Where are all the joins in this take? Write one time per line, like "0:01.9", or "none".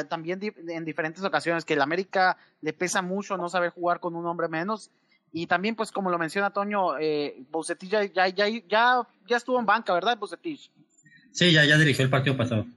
none